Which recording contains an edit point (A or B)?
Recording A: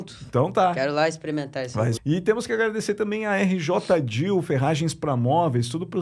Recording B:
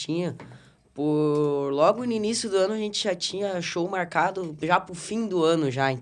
A